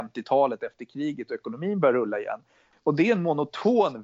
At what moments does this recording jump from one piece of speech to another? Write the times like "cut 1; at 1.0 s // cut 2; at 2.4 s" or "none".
cut 1; at 2.7 s